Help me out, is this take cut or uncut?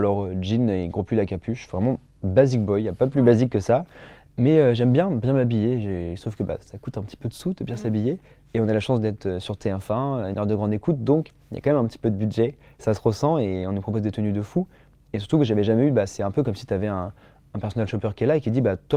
uncut